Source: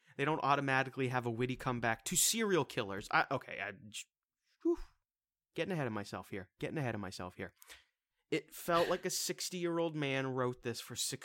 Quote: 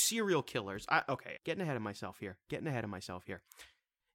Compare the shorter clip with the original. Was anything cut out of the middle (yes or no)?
yes